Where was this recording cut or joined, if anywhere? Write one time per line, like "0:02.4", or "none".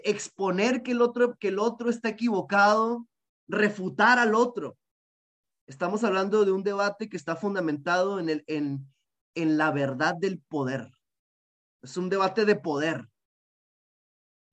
none